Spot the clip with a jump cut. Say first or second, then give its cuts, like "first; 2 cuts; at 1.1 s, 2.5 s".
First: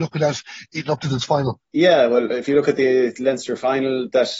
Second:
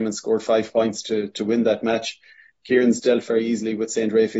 first; 1 cut; at 1.6 s